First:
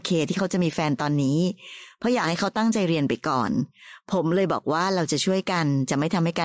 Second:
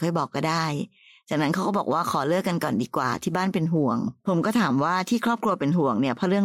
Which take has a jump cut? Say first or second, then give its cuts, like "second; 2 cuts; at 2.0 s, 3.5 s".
second; 1 cut; at 4.2 s